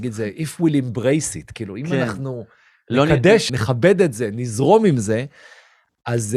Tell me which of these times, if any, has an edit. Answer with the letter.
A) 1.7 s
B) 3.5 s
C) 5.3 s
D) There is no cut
B